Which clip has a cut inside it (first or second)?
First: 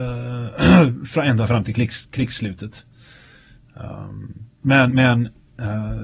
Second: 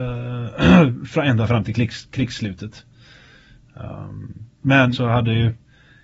second